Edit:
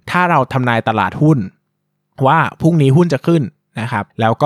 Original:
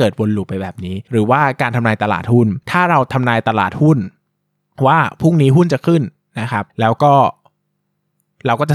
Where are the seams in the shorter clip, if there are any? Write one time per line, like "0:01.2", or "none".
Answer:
none